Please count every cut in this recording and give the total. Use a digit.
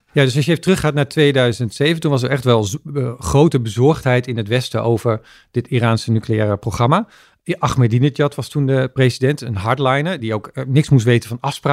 0